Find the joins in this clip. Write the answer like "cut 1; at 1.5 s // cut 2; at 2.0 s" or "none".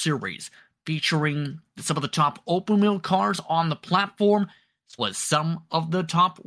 cut 1; at 5.0 s